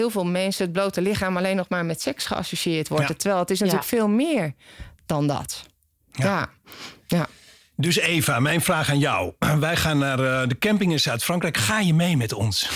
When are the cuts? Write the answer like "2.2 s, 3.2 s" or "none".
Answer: none

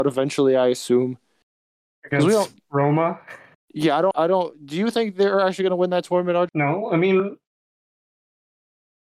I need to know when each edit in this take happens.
4.1 s, 6.5 s

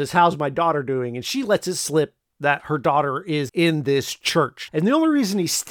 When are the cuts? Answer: 3.5 s, 4.7 s

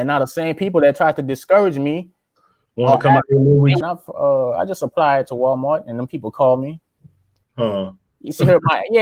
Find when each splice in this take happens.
3.8 s, 7.4 s

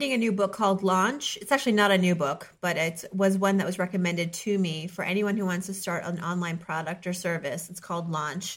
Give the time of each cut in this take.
none

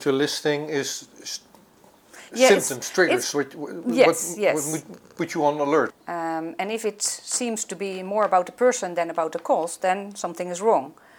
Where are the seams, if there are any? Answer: 5.9 s

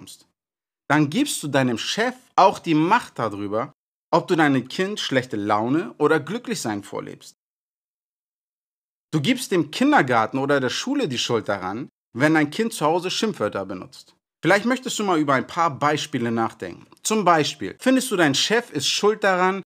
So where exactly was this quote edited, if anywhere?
14.3 s

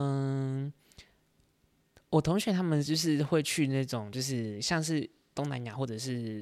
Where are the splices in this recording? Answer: none

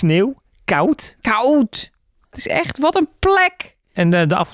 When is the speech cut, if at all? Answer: 2.2 s

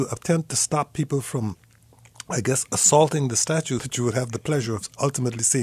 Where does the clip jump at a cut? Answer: 3.8 s

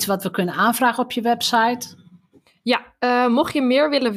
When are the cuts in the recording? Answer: none

